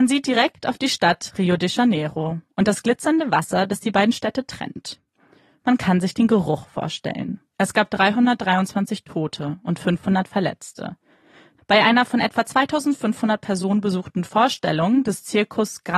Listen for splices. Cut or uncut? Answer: cut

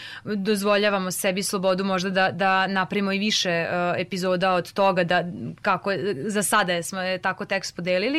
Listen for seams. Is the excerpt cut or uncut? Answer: uncut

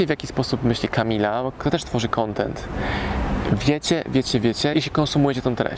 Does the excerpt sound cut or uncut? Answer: cut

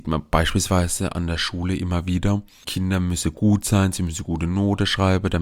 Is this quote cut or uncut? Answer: cut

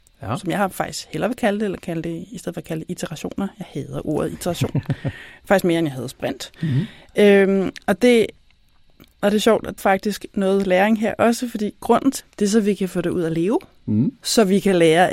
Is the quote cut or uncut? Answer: cut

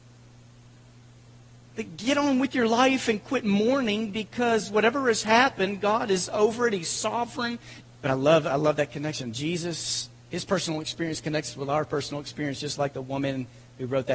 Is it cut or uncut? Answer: cut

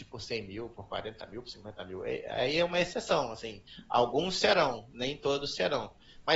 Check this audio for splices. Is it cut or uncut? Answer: uncut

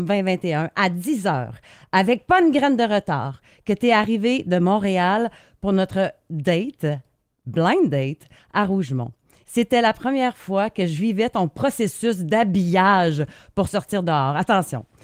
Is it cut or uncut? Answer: cut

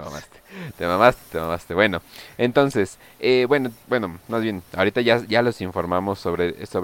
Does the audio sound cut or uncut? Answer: cut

